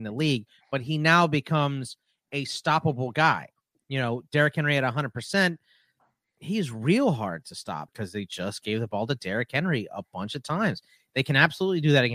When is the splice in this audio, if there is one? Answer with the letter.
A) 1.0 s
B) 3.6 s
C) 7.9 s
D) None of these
C